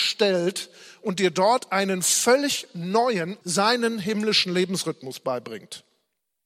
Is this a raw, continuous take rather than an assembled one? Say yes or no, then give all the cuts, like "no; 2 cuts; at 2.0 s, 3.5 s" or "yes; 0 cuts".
no; 1 cut; at 3.4 s